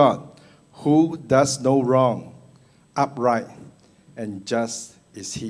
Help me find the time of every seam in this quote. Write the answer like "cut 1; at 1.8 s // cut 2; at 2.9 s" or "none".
none